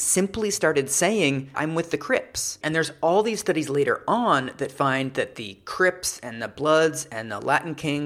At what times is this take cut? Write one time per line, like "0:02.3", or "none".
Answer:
0:01.5
0:02.6